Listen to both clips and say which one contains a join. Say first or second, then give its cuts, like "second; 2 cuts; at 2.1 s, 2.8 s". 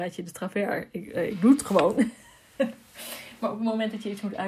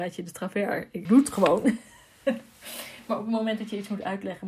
second; 1 cut; at 1.1 s